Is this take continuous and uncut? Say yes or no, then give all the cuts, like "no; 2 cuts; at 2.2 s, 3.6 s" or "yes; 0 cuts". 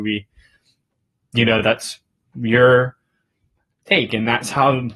yes; 0 cuts